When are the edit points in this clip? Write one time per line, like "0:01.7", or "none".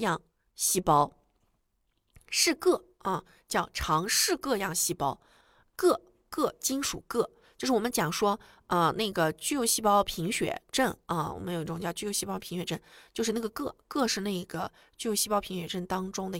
none